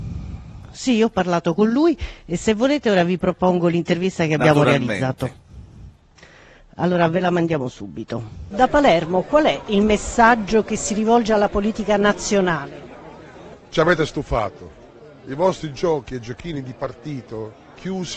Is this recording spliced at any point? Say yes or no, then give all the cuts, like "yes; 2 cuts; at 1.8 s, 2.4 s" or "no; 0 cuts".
no; 0 cuts